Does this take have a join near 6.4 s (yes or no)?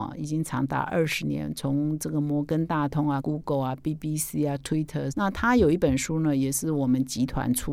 no